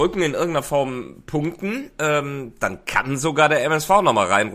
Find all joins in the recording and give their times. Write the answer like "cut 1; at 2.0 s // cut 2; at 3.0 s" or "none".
none